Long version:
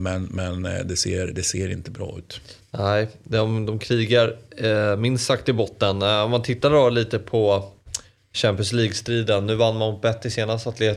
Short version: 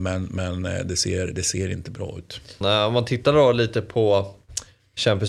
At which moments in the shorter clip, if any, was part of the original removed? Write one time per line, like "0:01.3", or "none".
0:02.6